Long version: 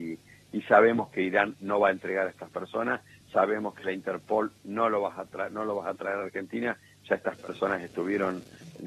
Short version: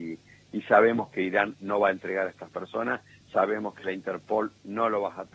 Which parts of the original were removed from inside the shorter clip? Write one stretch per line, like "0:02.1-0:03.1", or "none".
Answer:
none